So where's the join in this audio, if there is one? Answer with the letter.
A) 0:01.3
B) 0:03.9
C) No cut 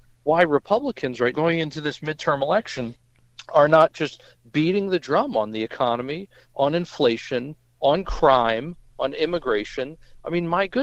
A